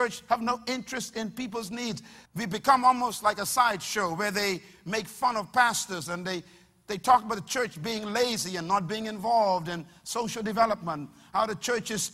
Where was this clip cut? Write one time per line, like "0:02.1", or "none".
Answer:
0:02.2